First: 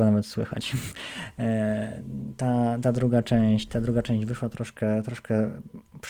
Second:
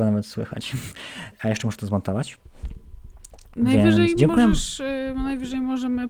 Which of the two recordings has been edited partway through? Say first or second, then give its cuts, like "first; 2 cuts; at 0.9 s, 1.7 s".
second; 1 cut; at 1.3 s